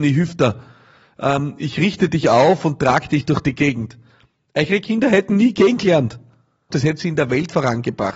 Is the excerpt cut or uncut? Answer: cut